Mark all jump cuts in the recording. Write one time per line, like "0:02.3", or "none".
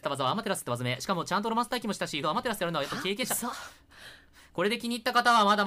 0:02.2